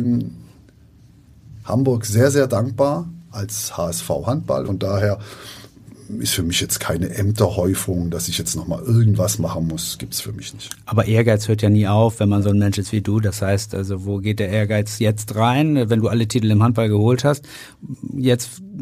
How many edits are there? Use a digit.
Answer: 1